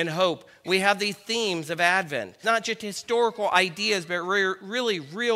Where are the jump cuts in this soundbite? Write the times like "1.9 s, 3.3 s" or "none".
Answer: 2.4 s